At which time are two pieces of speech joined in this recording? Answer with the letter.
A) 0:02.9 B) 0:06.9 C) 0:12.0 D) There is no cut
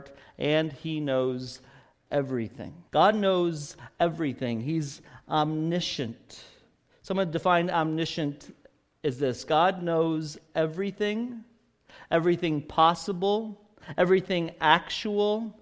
A